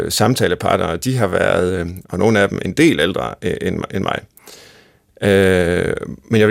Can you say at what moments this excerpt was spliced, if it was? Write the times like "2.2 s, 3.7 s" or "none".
2.0 s